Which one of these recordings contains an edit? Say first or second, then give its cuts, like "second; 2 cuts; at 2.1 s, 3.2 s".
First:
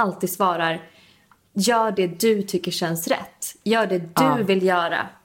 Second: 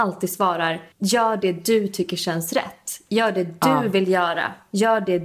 second; 1 cut; at 0.9 s